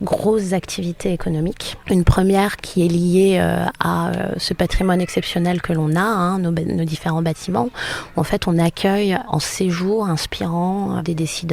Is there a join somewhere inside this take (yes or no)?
no